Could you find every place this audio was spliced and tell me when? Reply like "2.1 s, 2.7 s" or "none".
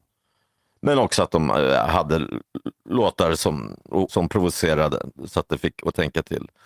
2.8 s, 4.1 s